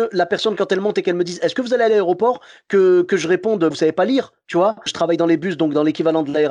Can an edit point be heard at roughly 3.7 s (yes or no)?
yes